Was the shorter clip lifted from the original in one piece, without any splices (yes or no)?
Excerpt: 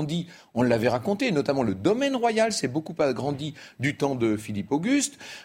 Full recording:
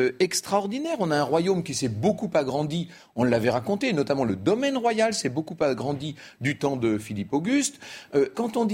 yes